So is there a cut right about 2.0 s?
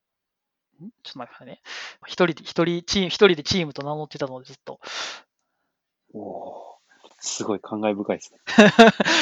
yes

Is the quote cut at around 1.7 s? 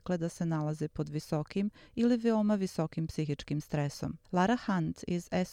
no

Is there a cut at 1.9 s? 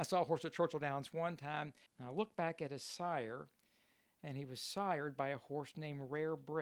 yes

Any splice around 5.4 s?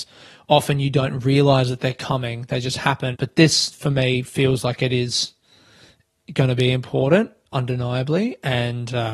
no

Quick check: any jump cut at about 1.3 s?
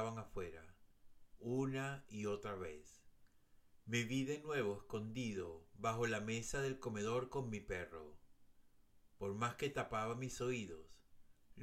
yes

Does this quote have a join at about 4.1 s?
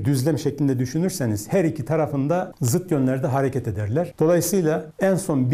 yes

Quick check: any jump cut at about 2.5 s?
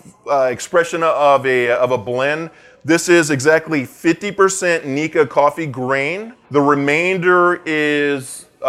no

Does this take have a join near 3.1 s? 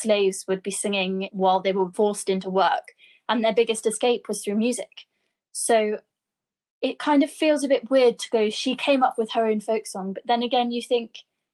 no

